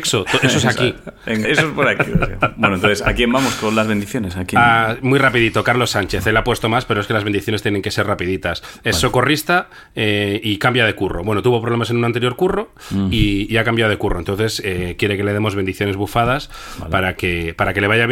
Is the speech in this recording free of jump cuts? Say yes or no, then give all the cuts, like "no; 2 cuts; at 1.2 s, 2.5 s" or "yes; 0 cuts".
no; 1 cut; at 1.4 s